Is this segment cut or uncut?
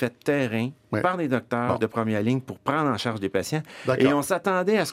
uncut